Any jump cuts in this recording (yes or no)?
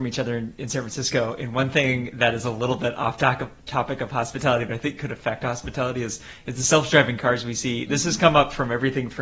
no